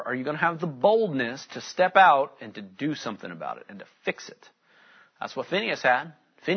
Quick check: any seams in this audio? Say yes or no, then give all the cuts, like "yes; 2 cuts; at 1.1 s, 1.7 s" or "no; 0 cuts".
no; 0 cuts